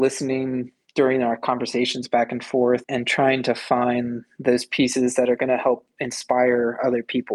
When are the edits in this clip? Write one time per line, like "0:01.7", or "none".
0:02.8